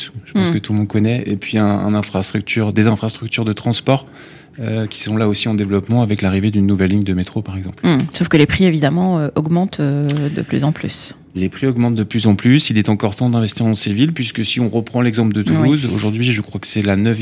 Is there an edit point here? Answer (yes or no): no